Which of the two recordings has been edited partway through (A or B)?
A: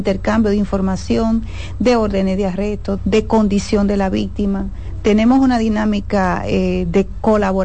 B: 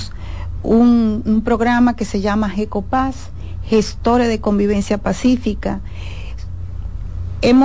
A